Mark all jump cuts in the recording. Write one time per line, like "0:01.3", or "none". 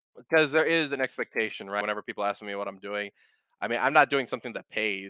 0:01.8